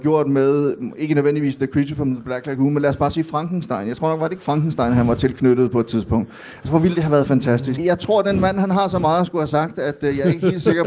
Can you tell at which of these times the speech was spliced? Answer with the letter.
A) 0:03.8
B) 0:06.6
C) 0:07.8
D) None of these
C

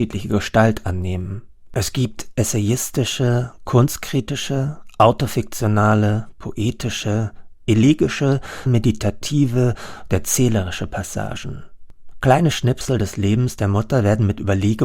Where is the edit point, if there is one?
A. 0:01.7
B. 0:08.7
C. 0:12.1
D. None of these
B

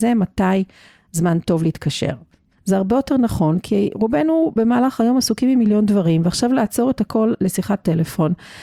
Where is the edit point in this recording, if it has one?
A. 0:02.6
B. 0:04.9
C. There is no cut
A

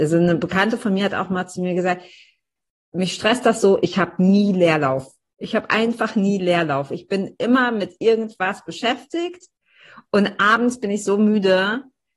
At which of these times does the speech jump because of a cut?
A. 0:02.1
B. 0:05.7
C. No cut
C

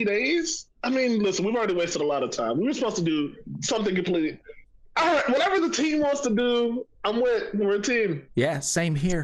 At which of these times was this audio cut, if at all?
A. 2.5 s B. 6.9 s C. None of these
B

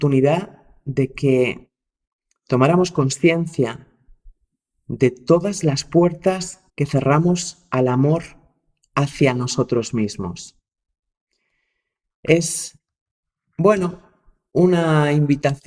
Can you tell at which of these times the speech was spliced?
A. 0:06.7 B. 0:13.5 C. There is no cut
A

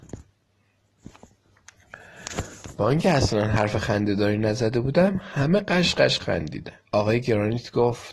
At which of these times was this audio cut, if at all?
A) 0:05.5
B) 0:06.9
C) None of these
B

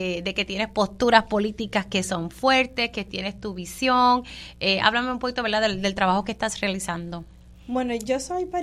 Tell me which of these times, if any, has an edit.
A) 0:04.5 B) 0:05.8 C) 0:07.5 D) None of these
D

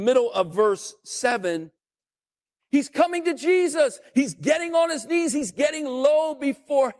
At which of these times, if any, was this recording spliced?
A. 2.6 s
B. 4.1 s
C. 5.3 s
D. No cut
A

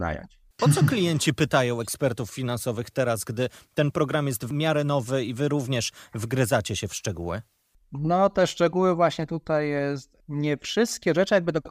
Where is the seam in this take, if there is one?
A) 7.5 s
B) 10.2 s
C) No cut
C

